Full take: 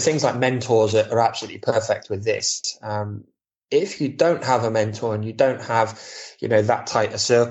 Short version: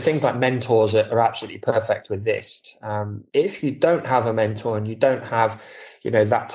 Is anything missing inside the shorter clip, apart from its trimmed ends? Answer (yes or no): yes